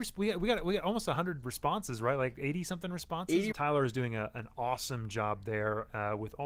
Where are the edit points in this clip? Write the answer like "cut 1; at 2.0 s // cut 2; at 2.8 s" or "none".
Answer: cut 1; at 3.5 s